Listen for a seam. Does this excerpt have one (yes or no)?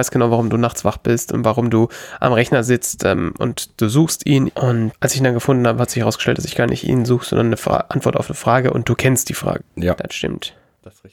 yes